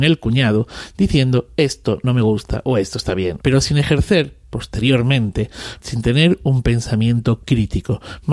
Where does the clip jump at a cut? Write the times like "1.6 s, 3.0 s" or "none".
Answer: 3.4 s, 5.8 s